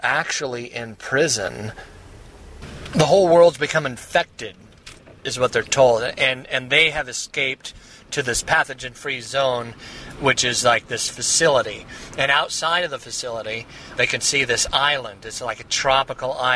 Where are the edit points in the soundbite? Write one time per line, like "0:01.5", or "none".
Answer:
0:14.0